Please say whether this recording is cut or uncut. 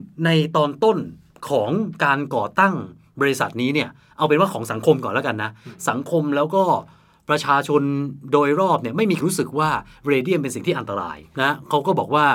cut